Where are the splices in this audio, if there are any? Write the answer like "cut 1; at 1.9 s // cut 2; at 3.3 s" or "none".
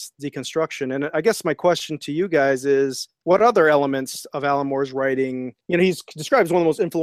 none